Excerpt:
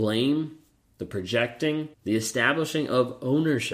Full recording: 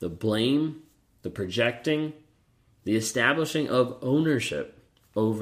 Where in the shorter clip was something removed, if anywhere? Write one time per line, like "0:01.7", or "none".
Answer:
0:01.9